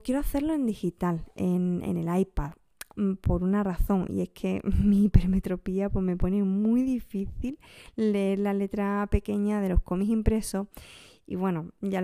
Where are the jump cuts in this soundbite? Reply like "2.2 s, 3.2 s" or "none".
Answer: none